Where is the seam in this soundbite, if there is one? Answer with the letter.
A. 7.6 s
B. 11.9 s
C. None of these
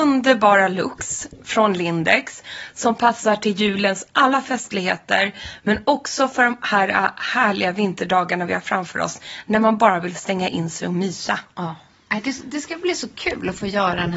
C